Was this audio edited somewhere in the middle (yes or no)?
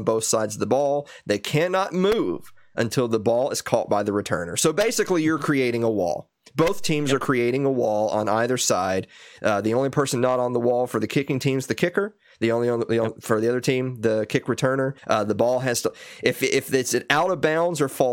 yes